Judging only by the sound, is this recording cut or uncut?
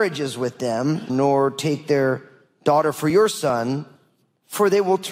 cut